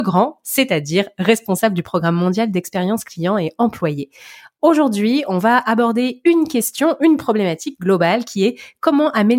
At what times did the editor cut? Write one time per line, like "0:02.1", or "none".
none